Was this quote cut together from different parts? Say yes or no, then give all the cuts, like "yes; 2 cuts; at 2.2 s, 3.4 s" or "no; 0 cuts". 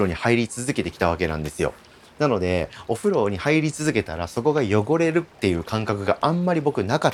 no; 0 cuts